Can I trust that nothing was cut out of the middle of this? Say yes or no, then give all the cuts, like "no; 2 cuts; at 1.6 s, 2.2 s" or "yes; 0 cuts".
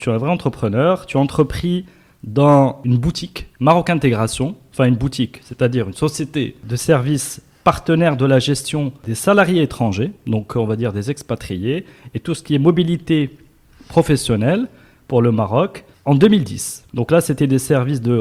yes; 0 cuts